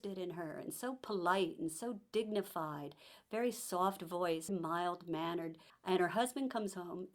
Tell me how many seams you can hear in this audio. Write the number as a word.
two